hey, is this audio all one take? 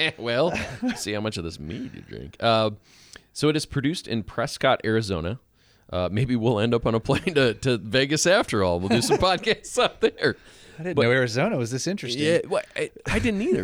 yes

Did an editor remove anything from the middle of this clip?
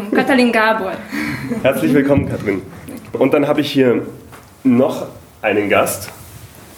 no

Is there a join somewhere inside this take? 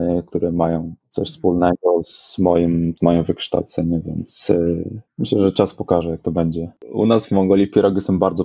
yes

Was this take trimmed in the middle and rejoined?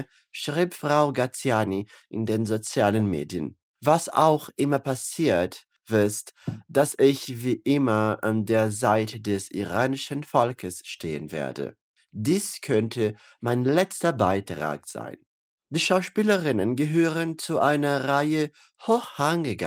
no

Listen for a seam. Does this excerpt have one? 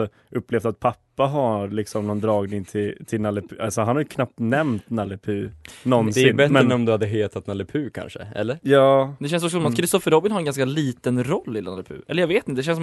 no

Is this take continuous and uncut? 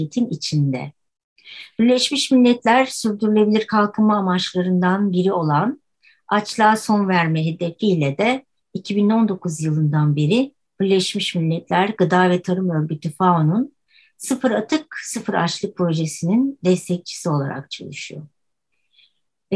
yes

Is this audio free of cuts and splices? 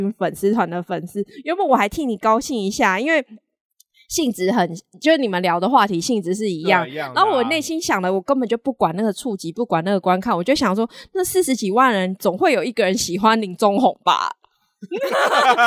yes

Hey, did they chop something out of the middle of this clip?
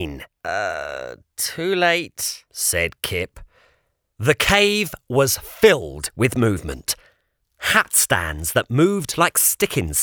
no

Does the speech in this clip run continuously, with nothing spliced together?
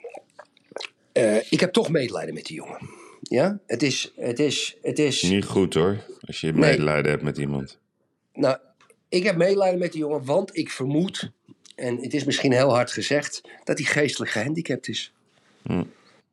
yes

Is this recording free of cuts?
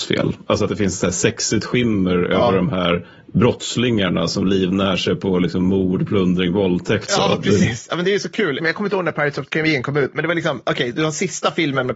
no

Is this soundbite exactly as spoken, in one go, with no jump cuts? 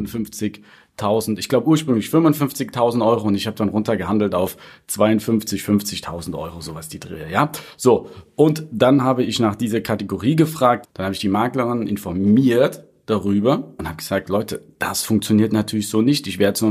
no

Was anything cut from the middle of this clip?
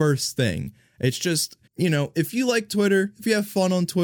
yes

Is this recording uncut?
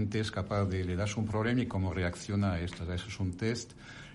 yes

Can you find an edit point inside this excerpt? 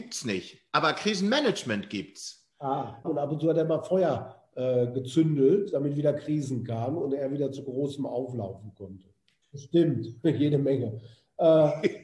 yes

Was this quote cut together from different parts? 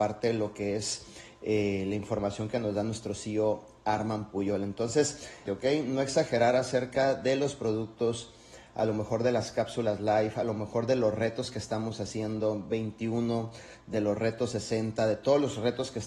yes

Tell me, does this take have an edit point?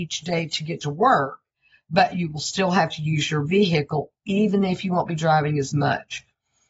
no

